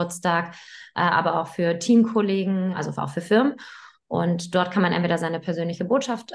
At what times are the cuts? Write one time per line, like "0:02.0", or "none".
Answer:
none